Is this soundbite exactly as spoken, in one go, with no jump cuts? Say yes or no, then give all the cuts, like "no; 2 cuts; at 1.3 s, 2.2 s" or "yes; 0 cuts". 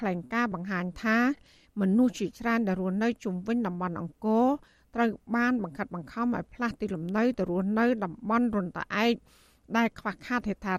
yes; 0 cuts